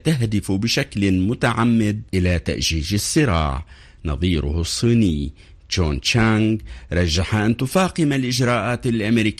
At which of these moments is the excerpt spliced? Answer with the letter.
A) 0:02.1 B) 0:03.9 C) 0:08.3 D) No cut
A